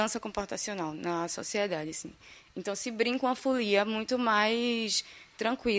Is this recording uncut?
yes; 0 cuts

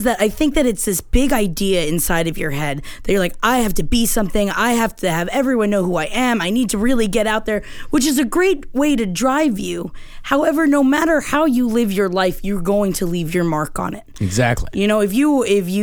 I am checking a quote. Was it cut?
no; 0 cuts

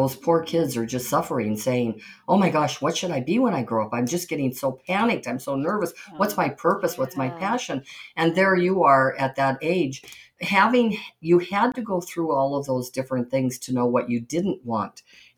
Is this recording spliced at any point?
no; 0 cuts

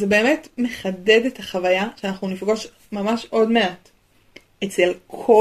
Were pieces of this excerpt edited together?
no; 0 cuts

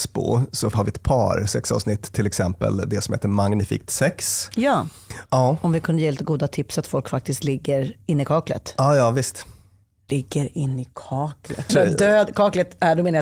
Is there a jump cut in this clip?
yes; 3 cuts; at 5.3 s, 10.1 s, 11.7 s

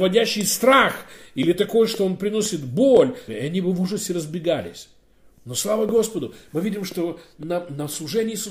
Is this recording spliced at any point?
yes; 1 cut; at 3.3 s

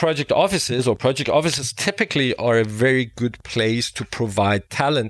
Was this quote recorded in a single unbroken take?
yes; 0 cuts

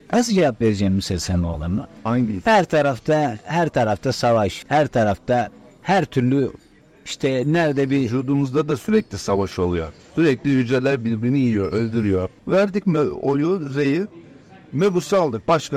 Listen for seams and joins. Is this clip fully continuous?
no; 2 cuts; at 4.6 s, 12.4 s

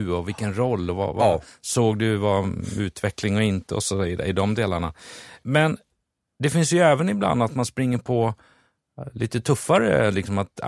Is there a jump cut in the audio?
no; 0 cuts

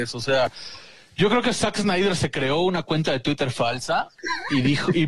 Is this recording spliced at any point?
no; 0 cuts

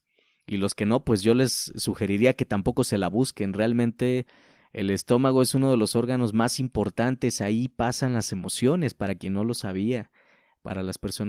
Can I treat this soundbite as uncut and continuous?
yes; 0 cuts

